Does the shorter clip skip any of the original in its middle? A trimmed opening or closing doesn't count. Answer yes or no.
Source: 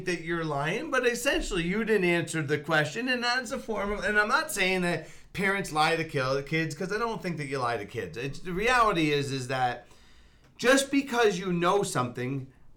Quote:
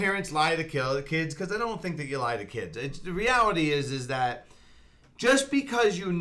no